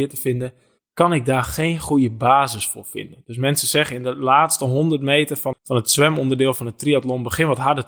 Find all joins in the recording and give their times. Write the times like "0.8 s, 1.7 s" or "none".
5.5 s